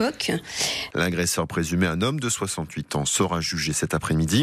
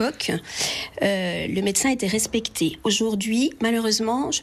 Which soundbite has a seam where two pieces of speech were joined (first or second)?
first